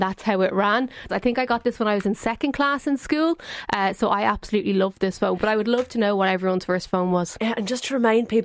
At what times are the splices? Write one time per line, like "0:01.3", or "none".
0:01.1

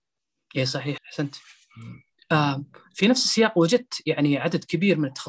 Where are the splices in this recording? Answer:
0:01.0

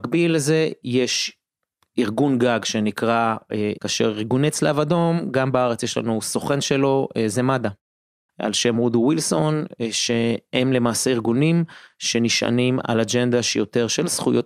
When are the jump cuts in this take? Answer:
0:03.8
0:08.3

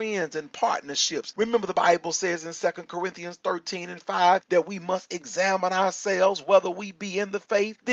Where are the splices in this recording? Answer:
0:01.3

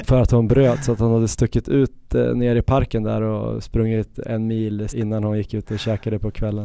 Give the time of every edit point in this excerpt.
0:04.9

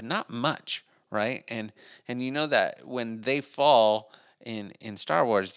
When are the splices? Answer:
none

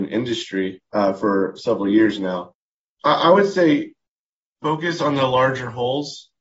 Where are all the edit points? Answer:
none

